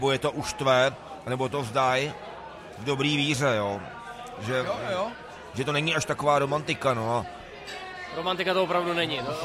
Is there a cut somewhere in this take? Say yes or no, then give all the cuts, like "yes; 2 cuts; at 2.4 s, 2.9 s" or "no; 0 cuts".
no; 0 cuts